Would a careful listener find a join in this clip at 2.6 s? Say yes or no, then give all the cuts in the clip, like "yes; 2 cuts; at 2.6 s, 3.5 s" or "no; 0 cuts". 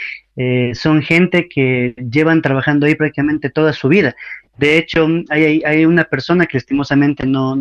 no; 1 cut; at 5.3 s